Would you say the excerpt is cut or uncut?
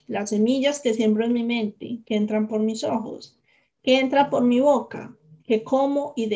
uncut